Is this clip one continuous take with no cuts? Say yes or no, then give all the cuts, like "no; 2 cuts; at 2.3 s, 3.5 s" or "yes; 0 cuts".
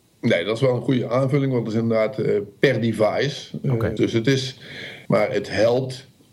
no; 2 cuts; at 4.0 s, 5.1 s